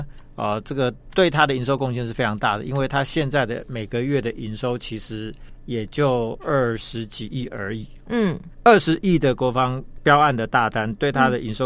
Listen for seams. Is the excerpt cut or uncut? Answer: uncut